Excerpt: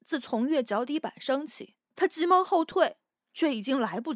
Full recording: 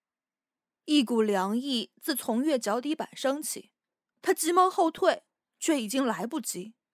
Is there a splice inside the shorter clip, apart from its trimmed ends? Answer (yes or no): yes